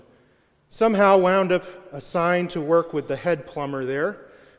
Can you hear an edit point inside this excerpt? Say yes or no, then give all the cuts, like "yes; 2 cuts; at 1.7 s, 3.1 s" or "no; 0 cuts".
no; 0 cuts